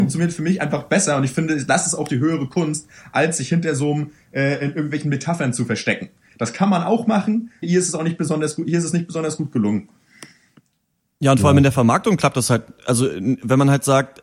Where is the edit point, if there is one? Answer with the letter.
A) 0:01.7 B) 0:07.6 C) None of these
B